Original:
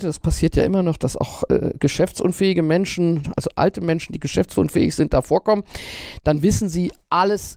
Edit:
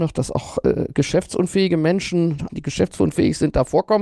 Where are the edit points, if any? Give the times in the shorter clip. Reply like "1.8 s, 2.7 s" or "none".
2.5 s